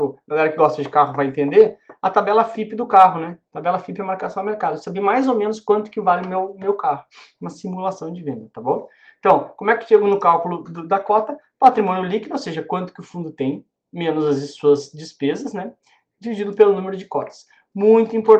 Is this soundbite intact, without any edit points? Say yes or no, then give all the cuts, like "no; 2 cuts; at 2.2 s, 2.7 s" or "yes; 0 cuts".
yes; 0 cuts